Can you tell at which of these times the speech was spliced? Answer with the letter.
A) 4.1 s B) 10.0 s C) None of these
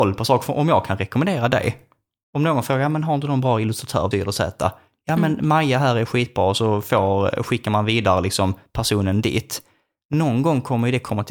A